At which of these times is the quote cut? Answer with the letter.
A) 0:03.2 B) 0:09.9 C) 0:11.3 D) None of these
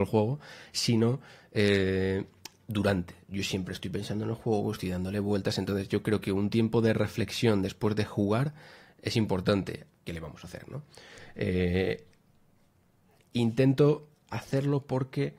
B